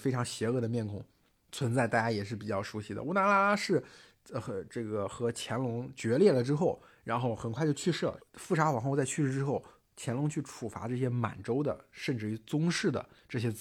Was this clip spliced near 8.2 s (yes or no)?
yes